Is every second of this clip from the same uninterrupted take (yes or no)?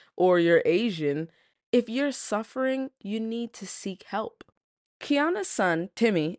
yes